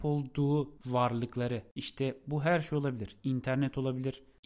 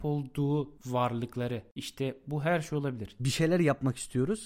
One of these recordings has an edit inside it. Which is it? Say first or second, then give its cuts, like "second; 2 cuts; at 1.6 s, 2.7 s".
second; 1 cut; at 3.2 s